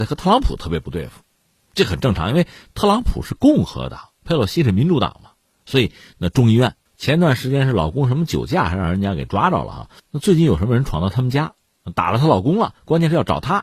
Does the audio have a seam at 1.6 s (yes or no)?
no